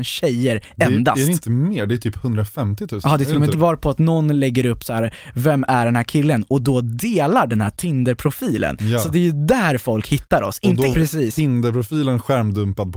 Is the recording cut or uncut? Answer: cut